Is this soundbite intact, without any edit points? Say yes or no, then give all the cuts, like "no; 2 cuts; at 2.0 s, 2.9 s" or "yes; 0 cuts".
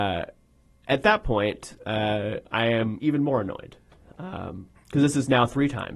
yes; 0 cuts